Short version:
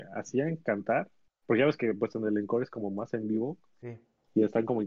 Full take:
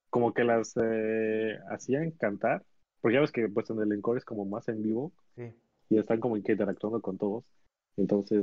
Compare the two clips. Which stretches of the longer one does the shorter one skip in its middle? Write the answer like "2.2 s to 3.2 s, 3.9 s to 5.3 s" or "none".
none